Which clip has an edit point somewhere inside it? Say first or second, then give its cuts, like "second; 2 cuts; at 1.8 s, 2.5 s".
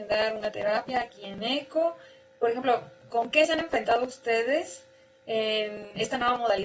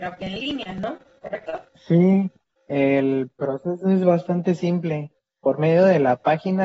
first; 1 cut; at 3.0 s